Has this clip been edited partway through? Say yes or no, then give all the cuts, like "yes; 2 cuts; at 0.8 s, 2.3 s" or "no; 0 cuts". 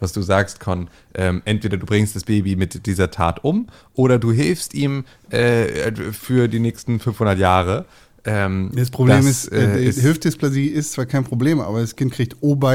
no; 0 cuts